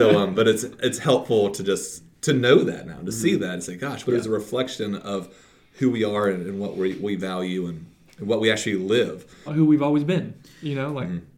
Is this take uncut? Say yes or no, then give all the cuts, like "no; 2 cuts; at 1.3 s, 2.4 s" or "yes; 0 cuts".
no; 2 cuts; at 4.0 s, 9.5 s